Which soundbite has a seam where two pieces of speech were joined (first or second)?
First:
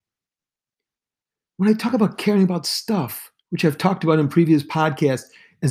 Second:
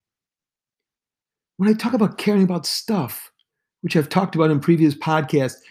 first